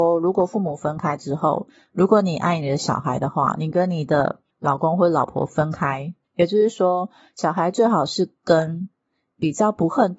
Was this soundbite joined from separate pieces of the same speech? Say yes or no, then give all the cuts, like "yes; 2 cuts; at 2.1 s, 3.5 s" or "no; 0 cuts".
yes; 1 cut; at 6.2 s